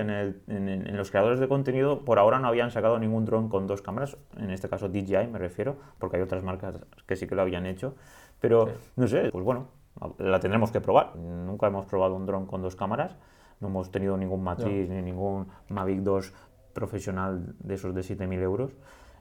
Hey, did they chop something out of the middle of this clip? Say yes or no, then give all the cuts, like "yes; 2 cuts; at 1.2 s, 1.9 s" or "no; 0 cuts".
yes; 2 cuts; at 9.3 s, 11.1 s